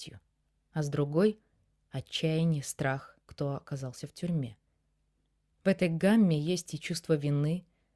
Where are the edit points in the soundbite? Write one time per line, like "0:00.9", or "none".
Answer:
0:03.3